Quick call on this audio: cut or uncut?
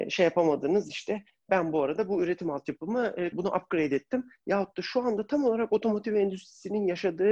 cut